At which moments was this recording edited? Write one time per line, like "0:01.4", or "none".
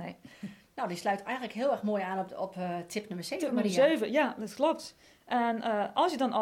none